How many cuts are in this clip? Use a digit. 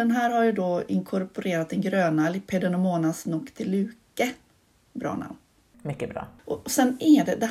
1